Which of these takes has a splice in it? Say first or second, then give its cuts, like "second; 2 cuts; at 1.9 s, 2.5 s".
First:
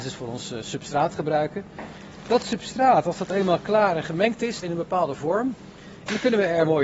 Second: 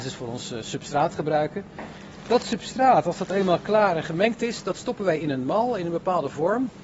first; 1 cut; at 4.6 s